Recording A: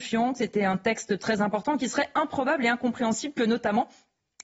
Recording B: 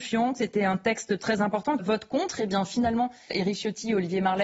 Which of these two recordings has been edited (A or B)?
B